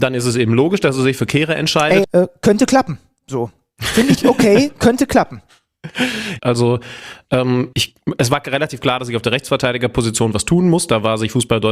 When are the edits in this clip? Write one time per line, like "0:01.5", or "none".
0:02.0
0:06.4
0:07.7